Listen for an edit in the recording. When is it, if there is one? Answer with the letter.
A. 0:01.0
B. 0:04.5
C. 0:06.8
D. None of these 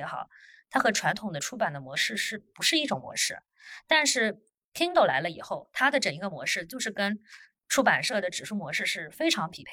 D